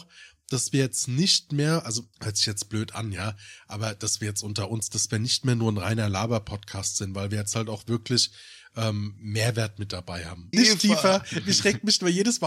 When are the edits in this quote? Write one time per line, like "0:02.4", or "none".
0:02.1
0:10.5